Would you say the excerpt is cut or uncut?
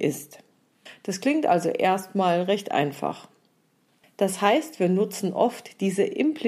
cut